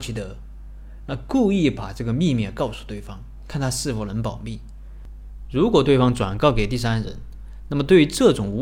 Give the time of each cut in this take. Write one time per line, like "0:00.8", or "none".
none